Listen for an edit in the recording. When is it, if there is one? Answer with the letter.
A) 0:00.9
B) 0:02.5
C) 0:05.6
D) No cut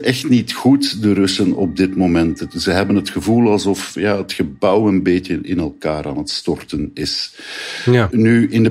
D